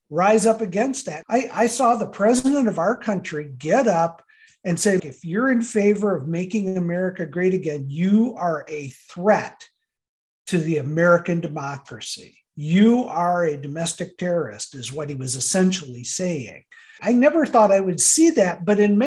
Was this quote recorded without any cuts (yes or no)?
no